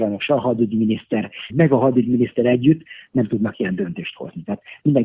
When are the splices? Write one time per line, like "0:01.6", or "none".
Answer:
0:01.5